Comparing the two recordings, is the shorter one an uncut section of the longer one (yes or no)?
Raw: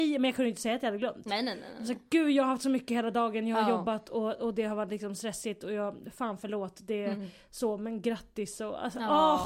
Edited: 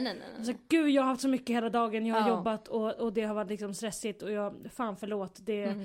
yes